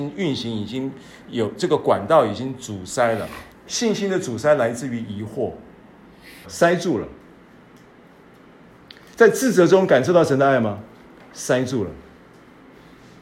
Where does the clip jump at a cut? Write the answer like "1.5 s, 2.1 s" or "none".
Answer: 3.5 s, 6.4 s